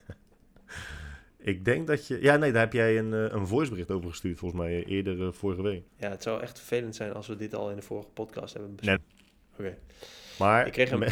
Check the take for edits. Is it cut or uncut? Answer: cut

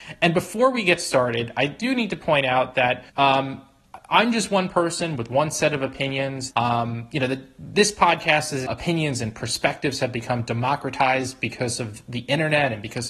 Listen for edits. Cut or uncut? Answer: cut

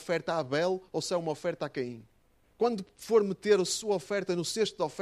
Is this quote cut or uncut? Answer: cut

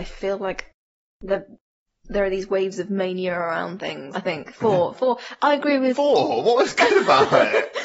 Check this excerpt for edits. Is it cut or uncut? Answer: cut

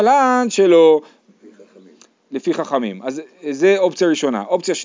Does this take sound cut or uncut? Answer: uncut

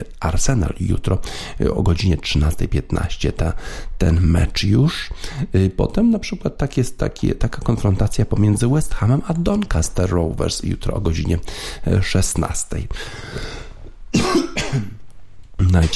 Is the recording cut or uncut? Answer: uncut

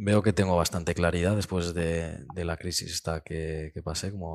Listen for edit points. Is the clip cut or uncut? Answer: uncut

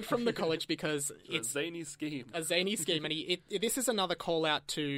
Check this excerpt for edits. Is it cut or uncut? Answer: uncut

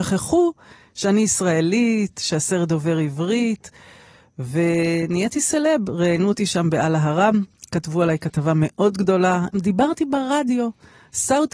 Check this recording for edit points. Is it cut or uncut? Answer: cut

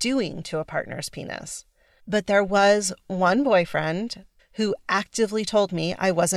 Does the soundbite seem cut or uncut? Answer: cut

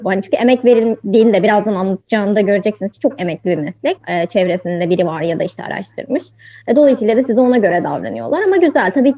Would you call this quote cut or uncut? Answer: cut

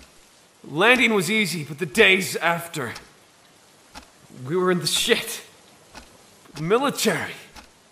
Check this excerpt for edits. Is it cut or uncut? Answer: cut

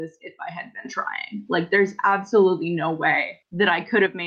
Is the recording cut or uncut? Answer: uncut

